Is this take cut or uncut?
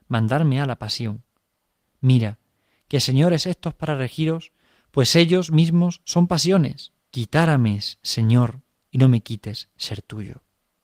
cut